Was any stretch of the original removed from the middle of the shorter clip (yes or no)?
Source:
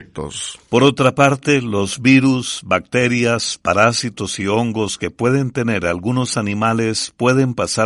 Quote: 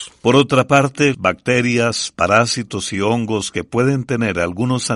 yes